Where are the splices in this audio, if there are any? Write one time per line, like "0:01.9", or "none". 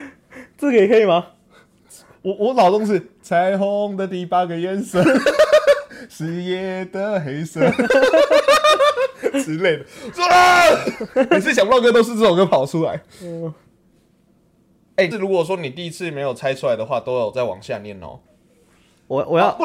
0:15.1
0:18.3